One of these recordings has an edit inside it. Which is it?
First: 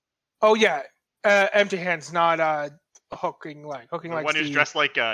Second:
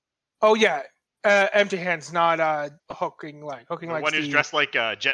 second; 1 cut; at 2.8 s

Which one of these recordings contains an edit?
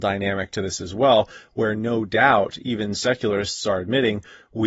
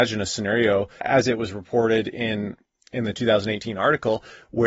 second; 1 cut; at 1.0 s

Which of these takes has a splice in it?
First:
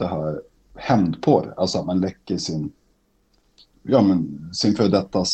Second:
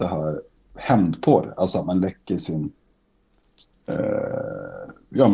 first; 1 cut; at 3.7 s

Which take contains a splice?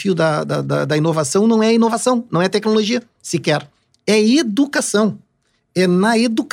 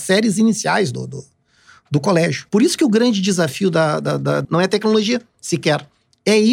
second; 2 cuts; at 2.5 s, 4.4 s

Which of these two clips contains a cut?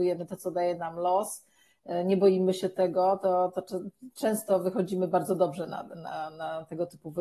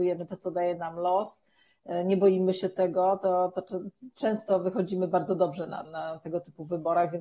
second; 1 cut; at 5.8 s

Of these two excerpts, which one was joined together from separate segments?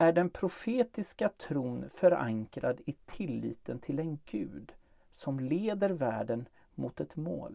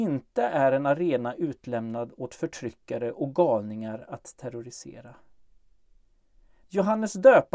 second; 1 cut; at 6.7 s

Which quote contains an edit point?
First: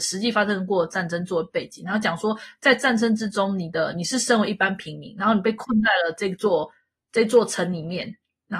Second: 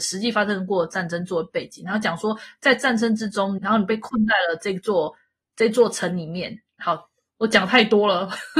second; 2 cuts; at 3.6 s, 6.8 s

